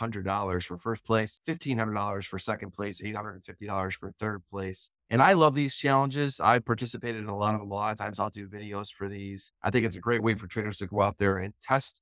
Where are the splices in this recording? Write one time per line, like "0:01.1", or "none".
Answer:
none